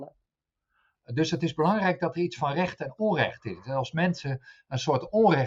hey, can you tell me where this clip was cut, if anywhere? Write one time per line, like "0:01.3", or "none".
0:00.9